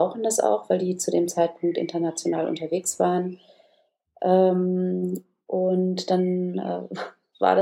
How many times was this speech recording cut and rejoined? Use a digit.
1